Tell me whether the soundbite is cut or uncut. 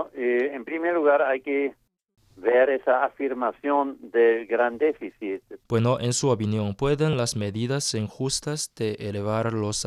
cut